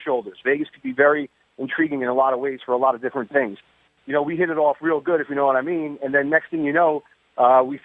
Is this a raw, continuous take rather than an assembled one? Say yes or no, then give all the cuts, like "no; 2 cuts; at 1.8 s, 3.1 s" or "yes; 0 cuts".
no; 1 cut; at 4.0 s